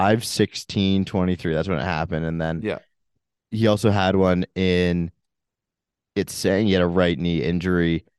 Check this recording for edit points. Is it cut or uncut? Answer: uncut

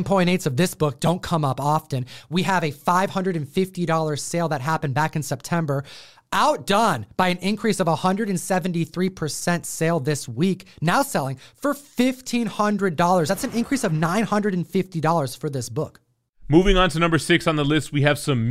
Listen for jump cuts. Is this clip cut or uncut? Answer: uncut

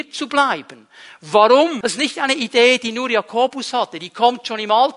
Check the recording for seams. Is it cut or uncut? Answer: cut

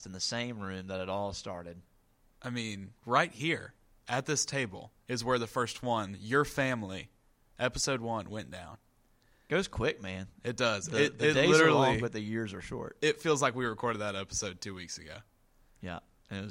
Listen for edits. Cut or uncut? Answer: cut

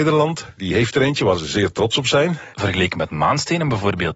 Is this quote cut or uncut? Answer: cut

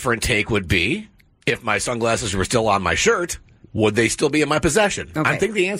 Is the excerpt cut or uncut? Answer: uncut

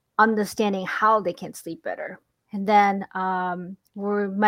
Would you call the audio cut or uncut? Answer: cut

